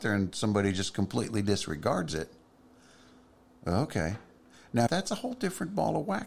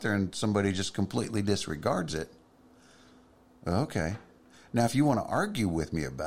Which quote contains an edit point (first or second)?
first